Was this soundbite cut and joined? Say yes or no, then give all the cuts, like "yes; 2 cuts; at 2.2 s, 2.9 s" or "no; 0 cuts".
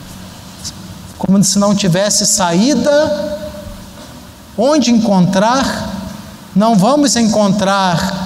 no; 0 cuts